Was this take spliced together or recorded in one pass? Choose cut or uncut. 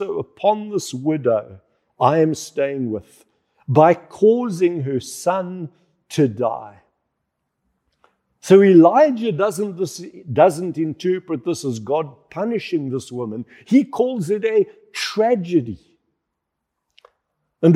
uncut